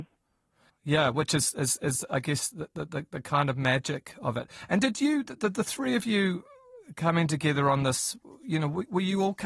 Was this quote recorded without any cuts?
yes; 0 cuts

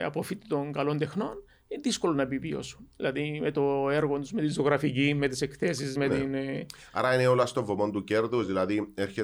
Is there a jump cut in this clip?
no; 0 cuts

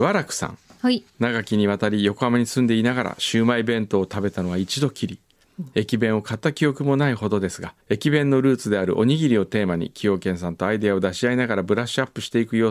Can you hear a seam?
yes; 2 cuts; at 1.1 s, 7.8 s

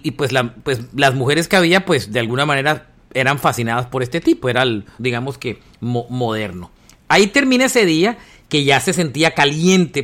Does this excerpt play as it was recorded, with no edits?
no; 1 cut; at 5.0 s

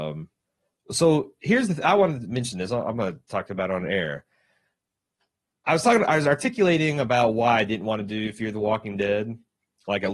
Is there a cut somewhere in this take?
no; 0 cuts

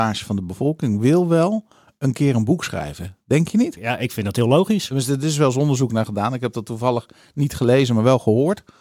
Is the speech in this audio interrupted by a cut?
no; 0 cuts

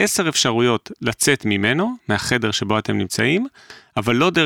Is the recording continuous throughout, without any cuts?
yes; 0 cuts

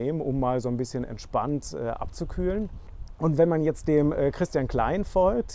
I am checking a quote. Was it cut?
no; 0 cuts

